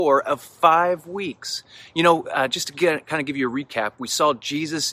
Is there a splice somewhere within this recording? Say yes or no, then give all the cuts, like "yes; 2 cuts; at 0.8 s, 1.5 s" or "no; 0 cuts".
no; 0 cuts